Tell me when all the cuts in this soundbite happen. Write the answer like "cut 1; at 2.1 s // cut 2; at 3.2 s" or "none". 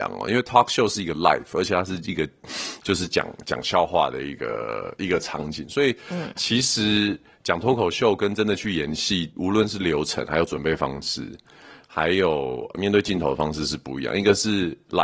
none